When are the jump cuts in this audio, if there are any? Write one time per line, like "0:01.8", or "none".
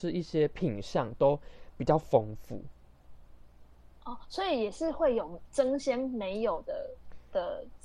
none